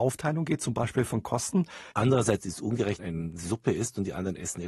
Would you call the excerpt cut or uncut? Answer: cut